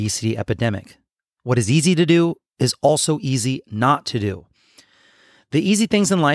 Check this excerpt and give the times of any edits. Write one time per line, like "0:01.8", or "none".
none